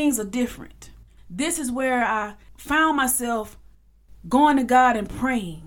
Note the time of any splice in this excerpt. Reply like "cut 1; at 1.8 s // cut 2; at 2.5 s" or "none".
cut 1; at 1.2 s